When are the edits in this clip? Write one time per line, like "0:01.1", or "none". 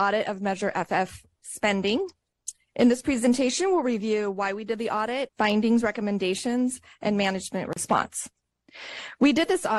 0:05.3